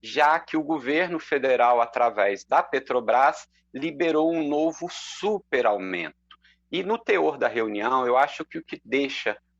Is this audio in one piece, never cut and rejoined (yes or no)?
yes